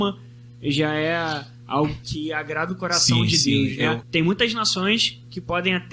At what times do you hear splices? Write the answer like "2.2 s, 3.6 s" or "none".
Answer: 4.0 s